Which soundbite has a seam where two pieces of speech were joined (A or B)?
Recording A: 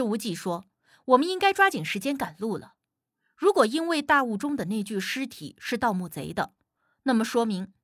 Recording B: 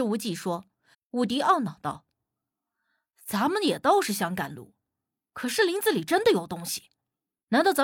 B